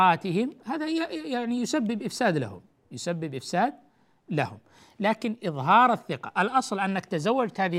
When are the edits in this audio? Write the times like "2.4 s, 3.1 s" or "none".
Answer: none